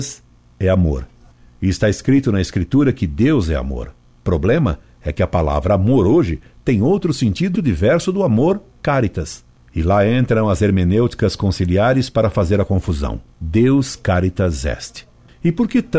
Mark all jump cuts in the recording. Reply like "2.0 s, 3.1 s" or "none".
7.5 s, 13.3 s